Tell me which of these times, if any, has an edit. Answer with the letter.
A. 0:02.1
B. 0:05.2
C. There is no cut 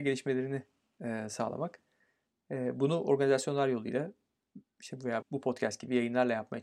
B